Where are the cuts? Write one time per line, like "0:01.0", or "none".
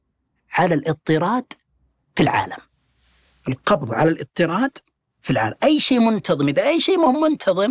none